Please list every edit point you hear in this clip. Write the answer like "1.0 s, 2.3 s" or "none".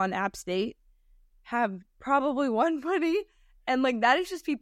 none